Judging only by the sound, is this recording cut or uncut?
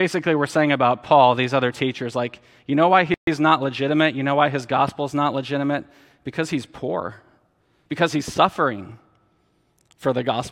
cut